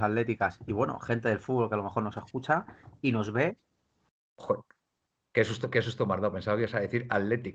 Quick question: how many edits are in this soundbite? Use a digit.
0